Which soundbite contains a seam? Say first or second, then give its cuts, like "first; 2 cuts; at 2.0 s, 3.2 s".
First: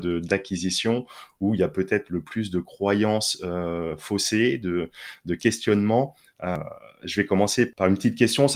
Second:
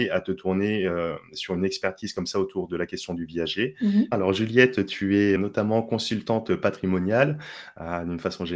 second; 2 cuts; at 4.1 s, 5.4 s